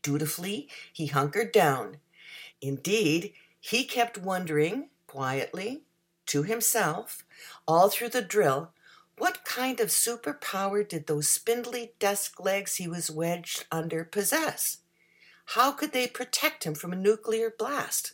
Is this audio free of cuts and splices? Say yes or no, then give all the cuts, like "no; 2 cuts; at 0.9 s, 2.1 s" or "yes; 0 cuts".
no; 1 cut; at 2.5 s